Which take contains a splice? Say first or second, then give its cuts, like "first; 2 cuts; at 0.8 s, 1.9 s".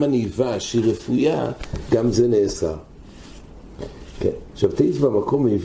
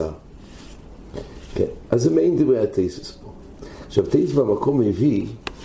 first; 1 cut; at 4.5 s